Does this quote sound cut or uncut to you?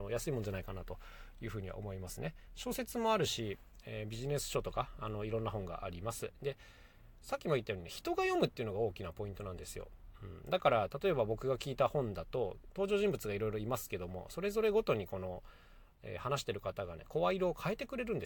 uncut